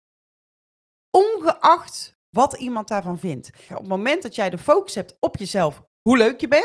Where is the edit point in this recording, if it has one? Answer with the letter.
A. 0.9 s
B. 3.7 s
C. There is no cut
B